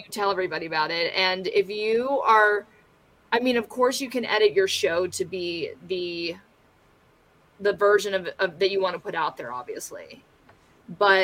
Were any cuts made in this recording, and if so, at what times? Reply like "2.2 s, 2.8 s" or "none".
none